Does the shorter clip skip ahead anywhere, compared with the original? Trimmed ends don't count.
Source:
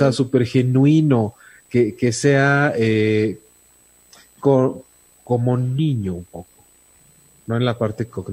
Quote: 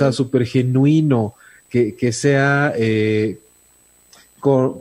no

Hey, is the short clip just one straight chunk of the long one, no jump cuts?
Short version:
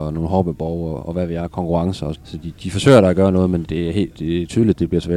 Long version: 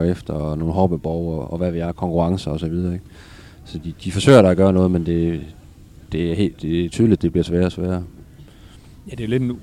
no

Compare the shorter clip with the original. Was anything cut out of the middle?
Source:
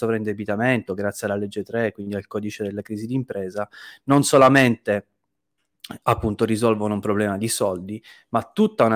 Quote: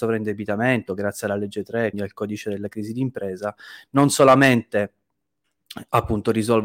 yes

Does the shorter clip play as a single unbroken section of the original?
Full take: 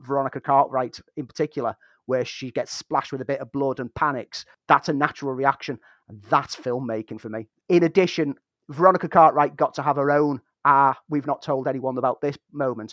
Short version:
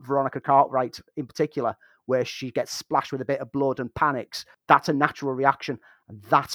yes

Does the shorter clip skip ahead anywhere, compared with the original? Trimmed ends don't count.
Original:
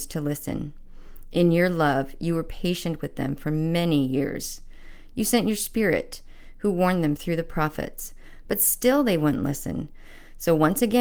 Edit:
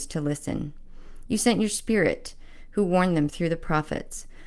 yes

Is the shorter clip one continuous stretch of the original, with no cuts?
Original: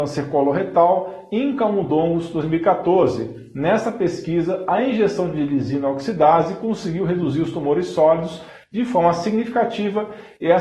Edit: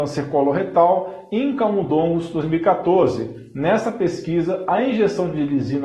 yes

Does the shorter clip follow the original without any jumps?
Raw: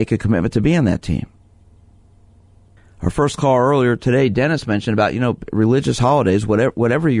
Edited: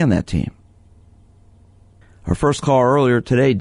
yes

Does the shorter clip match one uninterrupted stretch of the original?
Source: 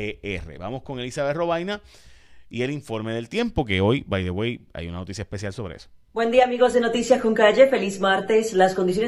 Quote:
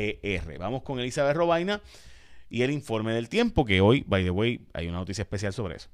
yes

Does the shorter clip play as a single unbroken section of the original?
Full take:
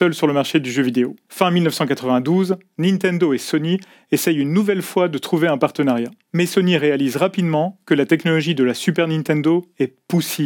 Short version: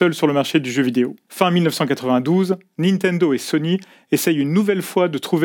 yes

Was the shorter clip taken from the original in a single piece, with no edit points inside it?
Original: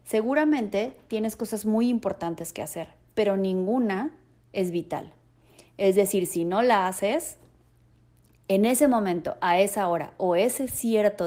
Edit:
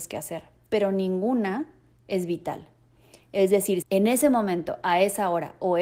no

